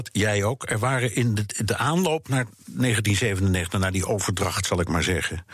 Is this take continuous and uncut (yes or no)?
yes